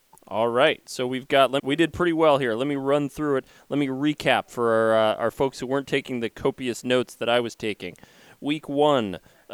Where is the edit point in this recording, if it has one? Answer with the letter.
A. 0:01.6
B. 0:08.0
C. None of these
A